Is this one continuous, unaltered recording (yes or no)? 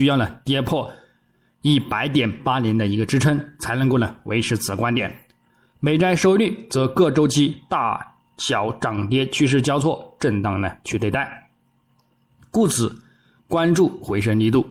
no